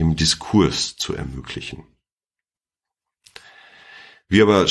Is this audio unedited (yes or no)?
yes